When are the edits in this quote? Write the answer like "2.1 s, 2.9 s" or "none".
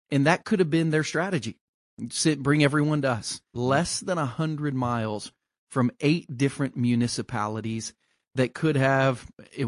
3.5 s